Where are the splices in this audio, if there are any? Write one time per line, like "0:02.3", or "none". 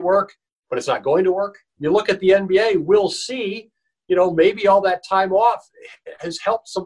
0:01.7